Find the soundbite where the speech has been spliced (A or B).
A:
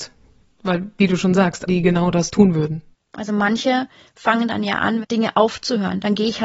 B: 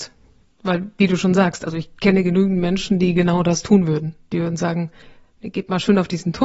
A